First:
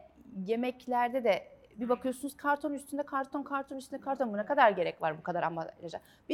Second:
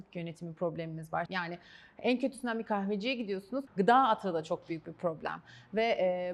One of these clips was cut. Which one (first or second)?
second